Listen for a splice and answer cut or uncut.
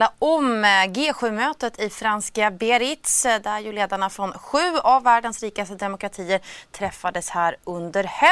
uncut